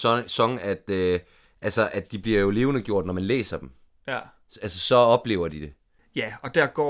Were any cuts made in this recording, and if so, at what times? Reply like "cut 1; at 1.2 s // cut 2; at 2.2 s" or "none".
cut 1; at 6.0 s